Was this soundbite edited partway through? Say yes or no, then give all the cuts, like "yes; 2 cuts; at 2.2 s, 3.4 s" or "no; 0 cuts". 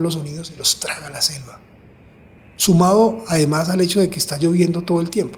yes; 1 cut; at 2.4 s